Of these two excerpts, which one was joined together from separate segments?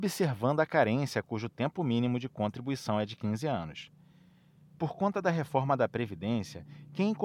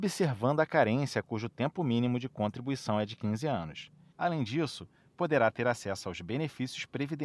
second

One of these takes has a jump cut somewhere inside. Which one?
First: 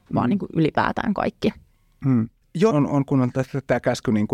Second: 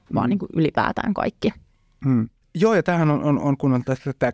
first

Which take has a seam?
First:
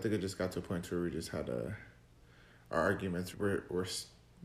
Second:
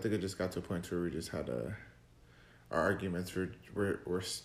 first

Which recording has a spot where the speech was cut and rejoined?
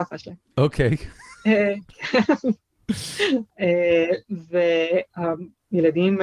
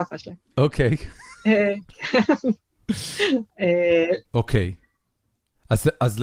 second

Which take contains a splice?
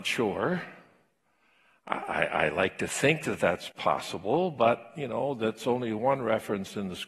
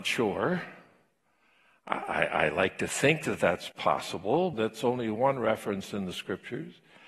second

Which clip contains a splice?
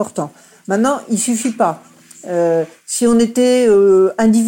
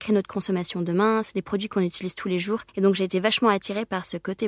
second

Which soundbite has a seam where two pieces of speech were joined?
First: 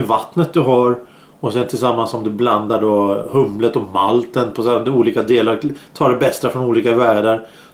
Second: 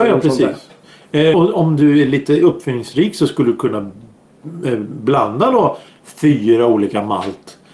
second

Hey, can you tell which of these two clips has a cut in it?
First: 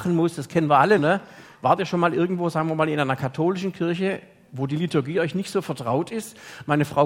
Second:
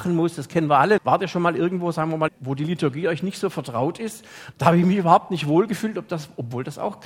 second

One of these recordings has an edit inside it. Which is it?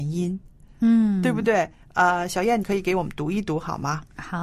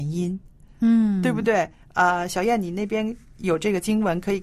first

